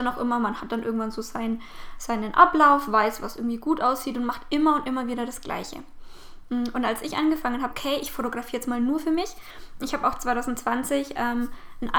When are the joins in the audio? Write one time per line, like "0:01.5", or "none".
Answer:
0:07.7

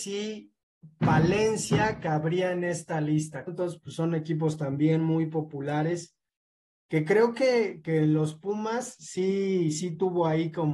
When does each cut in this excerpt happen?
0:03.5

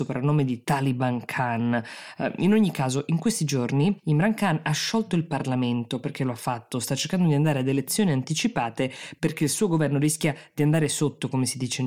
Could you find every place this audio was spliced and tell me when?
none

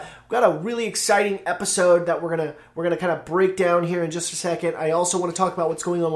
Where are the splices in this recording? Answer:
none

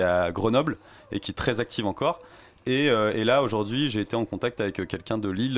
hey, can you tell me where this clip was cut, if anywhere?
none

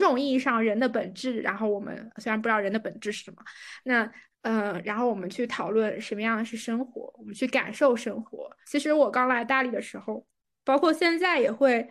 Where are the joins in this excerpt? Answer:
0:08.6

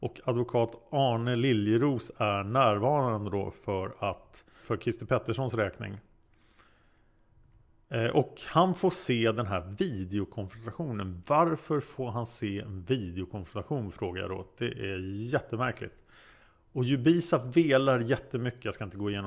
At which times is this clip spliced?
0:04.6

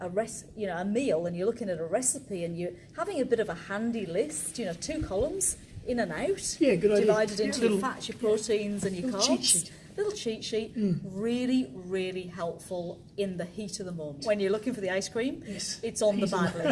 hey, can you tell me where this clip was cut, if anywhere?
0:02.9
0:14.2

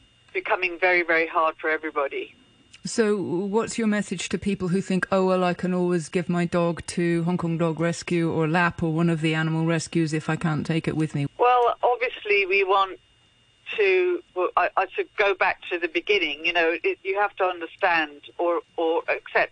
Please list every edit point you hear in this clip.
0:11.3
0:14.3
0:17.0

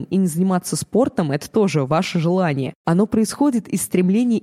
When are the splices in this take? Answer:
none

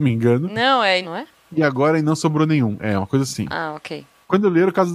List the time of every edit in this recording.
0:01.0

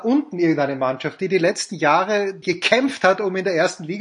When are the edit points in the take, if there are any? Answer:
0:02.4

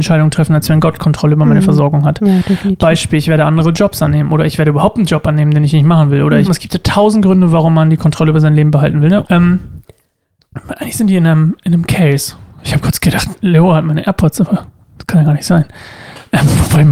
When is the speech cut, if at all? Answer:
0:06.4
0:09.2

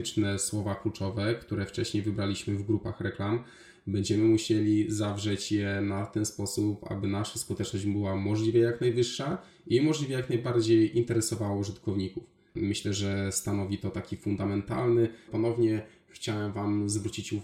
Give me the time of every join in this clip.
0:12.5
0:15.3

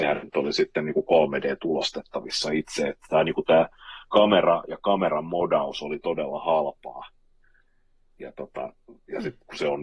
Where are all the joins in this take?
none

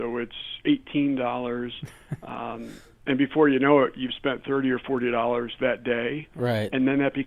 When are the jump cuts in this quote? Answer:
none

